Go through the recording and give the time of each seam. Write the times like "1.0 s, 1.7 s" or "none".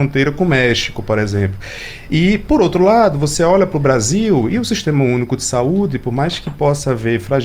none